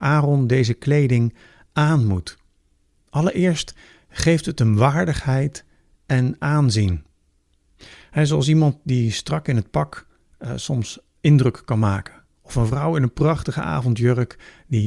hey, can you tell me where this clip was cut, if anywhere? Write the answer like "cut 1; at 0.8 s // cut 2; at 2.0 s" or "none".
none